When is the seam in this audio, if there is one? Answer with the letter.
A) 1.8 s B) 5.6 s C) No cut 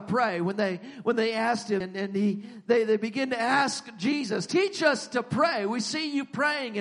A